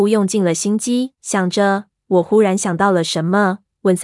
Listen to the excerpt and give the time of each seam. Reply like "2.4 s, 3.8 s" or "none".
1.2 s